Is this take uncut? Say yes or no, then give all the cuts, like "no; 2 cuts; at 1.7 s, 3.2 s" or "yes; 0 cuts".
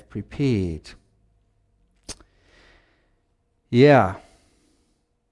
yes; 0 cuts